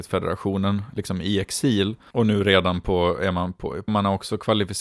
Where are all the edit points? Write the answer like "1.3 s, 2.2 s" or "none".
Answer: 2.1 s, 3.9 s